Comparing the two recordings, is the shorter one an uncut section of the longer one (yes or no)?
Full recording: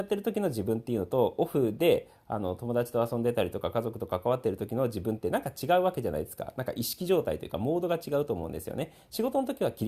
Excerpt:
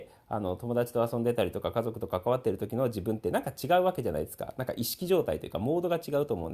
yes